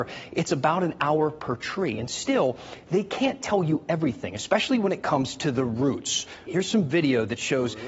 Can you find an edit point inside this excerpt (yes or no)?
yes